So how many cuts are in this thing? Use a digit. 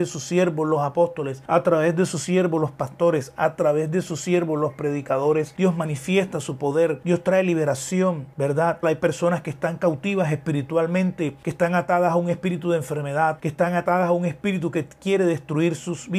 2